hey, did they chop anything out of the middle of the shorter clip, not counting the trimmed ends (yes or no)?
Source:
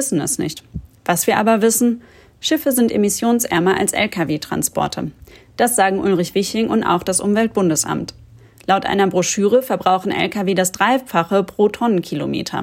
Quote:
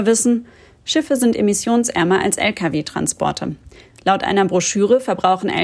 yes